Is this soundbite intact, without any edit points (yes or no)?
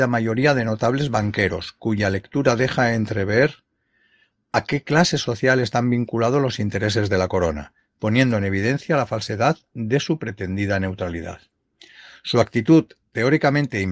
yes